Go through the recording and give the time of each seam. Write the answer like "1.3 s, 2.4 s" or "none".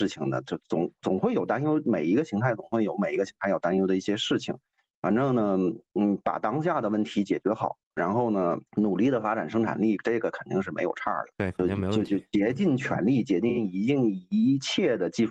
8.7 s, 11.3 s